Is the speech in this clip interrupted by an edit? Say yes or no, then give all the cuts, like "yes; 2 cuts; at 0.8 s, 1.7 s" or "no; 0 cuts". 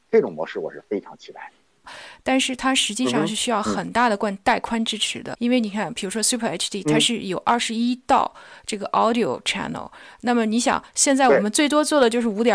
yes; 2 cuts; at 1.8 s, 5.3 s